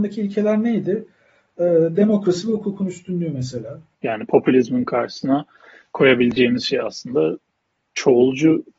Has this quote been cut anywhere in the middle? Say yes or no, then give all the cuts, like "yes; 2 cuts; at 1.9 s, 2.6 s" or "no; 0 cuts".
yes; 1 cut; at 3.9 s